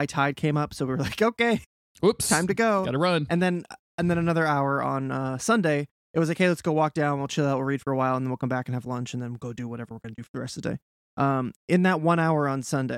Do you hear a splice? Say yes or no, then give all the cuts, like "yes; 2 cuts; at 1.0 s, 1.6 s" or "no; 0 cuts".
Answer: no; 0 cuts